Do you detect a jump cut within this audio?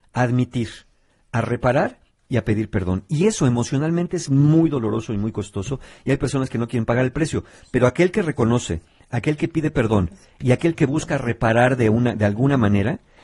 no; 0 cuts

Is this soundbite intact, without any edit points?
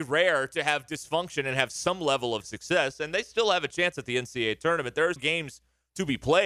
no; 1 cut; at 5.2 s

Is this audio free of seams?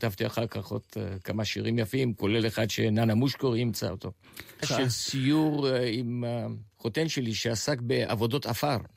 no; 2 cuts; at 4.6 s, 6.7 s

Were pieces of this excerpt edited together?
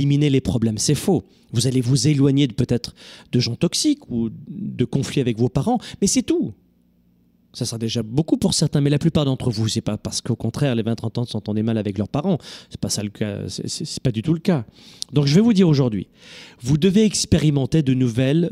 no; 0 cuts

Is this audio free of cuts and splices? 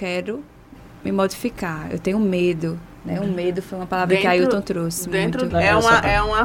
no; 1 cut; at 5.5 s

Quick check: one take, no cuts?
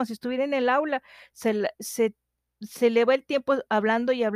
no; 1 cut; at 1.7 s

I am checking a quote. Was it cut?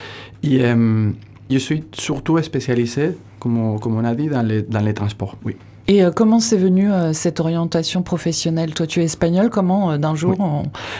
yes; 1 cut; at 1.5 s

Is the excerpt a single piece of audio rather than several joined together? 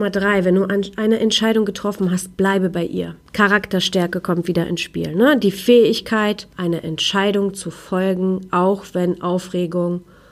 yes; 0 cuts

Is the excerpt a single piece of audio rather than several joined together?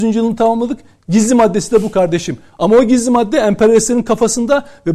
yes; 0 cuts

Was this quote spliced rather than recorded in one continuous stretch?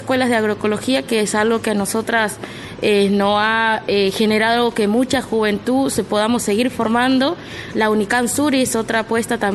no; 0 cuts

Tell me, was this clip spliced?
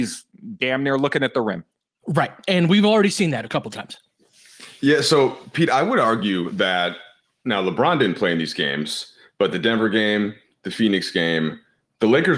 no; 0 cuts

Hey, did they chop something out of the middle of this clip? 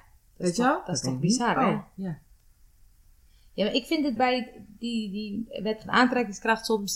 yes; 1 cut; at 4.2 s

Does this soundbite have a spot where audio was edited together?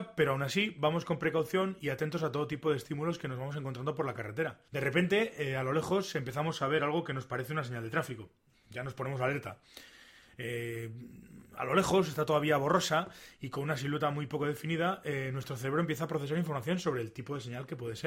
no; 0 cuts

